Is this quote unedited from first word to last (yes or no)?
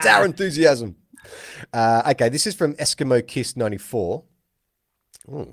yes